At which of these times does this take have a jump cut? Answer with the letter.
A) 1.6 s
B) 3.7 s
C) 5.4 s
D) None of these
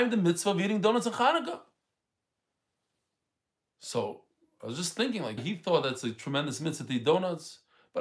C